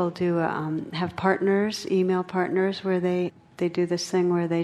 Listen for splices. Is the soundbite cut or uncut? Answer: uncut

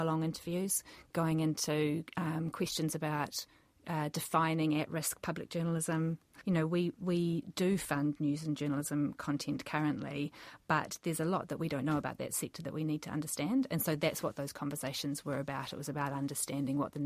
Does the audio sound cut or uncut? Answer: uncut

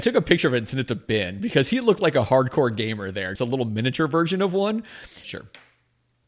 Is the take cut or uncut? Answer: cut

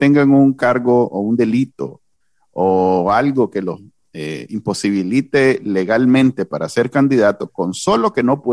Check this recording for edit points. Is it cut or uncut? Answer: uncut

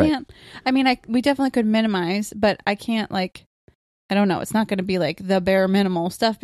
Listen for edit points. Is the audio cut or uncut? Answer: uncut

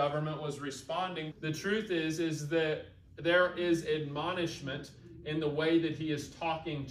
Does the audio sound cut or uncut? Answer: cut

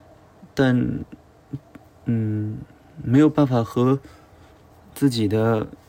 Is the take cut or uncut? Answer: uncut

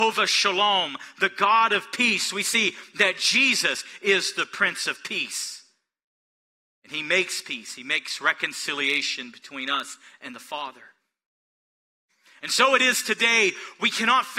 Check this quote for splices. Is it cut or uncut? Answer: uncut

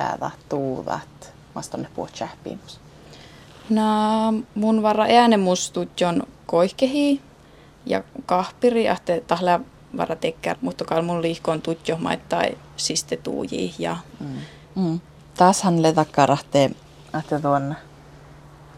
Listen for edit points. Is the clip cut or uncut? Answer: cut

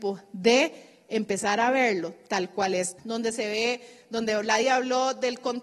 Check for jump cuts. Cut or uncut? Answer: cut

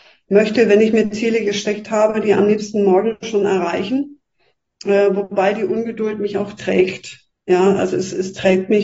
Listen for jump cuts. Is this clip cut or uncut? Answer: uncut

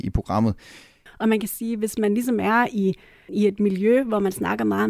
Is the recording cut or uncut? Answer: cut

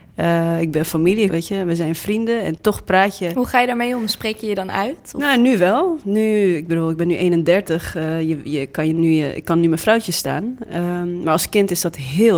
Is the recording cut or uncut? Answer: cut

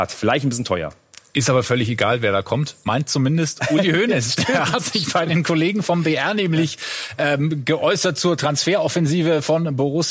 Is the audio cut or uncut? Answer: uncut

